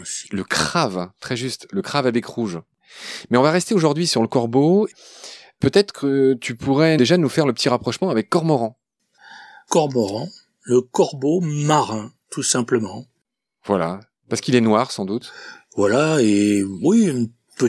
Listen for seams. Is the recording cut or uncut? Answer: uncut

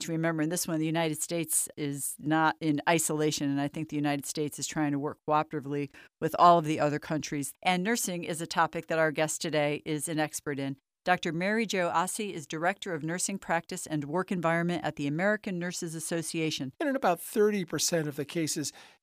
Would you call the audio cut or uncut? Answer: cut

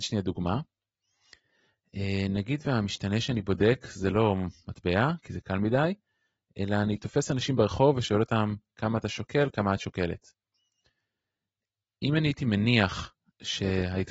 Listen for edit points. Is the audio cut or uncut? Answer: uncut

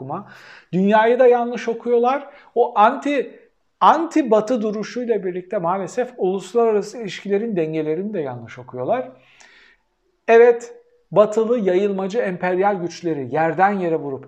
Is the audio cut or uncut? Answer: uncut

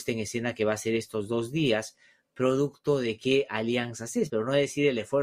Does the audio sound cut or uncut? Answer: cut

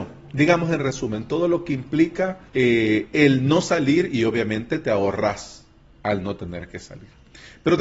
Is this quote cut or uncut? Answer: cut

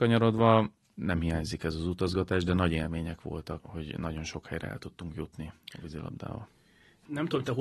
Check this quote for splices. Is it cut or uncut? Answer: cut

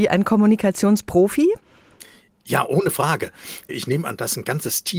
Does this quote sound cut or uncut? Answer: uncut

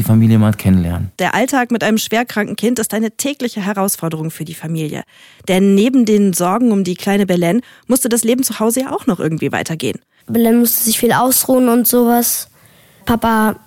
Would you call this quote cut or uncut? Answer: cut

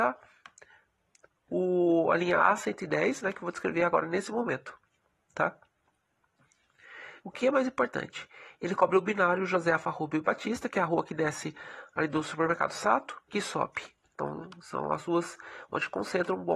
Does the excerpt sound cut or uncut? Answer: cut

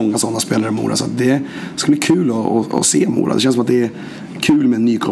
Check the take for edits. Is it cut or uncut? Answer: uncut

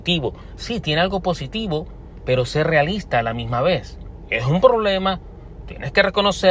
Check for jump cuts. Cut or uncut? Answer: uncut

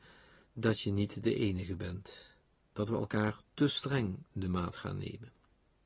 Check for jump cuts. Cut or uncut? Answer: cut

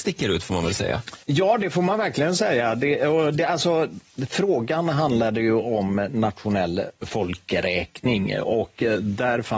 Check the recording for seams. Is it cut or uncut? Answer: cut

